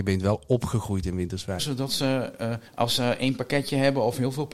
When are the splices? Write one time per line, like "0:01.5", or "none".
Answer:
0:01.6
0:02.7